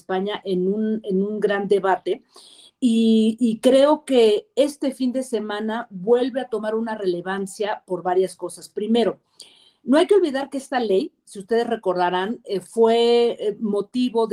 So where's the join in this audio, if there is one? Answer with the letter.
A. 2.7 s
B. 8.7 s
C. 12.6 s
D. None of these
D